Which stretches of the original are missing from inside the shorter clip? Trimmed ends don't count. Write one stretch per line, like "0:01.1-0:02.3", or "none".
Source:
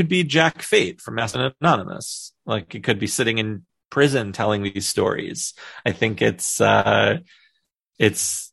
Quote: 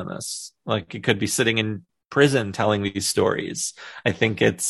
none